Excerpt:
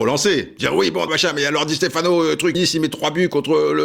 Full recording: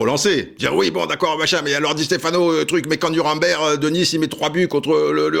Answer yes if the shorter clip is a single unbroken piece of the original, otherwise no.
no